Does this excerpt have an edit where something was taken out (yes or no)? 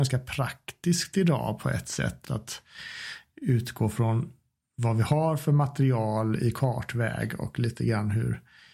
yes